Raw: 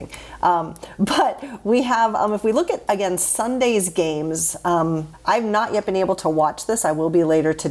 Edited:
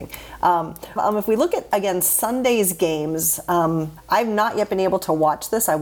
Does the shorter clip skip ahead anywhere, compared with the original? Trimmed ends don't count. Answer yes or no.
yes